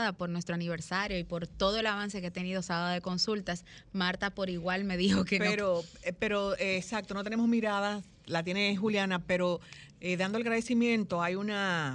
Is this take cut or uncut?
uncut